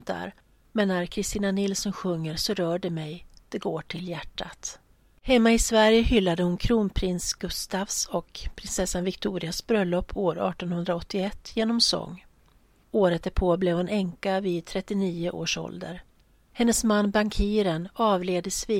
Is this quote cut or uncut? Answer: uncut